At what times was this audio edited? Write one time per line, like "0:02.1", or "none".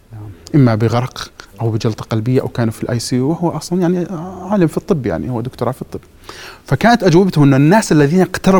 none

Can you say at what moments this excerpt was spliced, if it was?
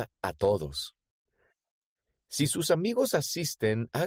none

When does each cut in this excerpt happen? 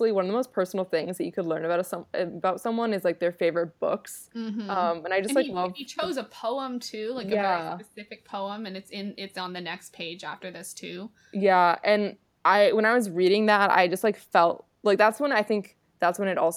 none

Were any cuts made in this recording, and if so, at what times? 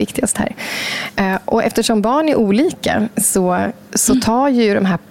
none

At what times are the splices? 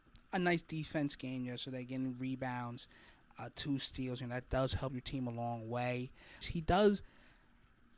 0:06.4

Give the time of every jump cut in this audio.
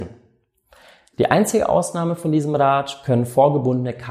0:01.1

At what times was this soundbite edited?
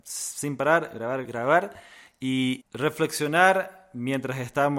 0:01.2
0:02.6

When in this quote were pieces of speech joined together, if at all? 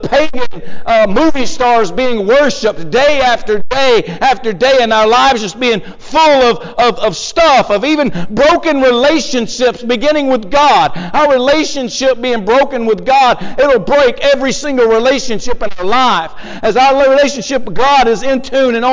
none

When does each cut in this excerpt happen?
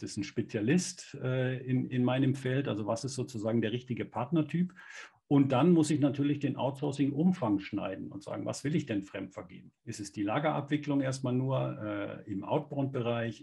0:09.8

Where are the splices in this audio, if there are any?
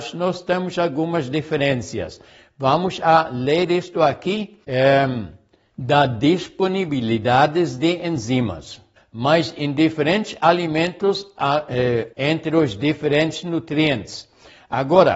0:04.6
0:09.0
0:12.1

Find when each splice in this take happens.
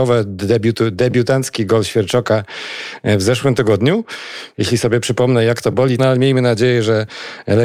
0:04.5
0:06.0

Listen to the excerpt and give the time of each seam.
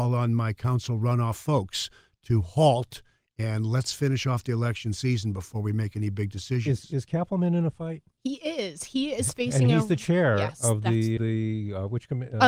0:11.2

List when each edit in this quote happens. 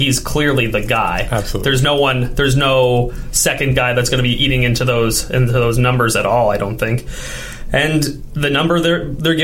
none

